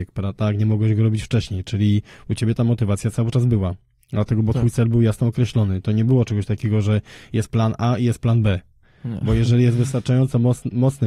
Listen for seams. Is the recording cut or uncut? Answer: uncut